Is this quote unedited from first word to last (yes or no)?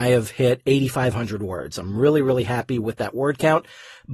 yes